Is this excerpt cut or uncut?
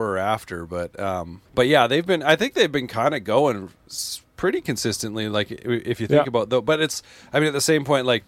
cut